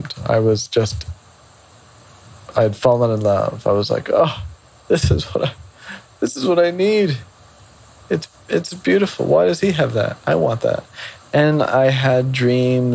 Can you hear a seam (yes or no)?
no